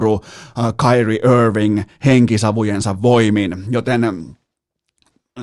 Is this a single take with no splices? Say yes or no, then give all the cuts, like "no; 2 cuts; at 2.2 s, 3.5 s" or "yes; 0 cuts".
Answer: yes; 0 cuts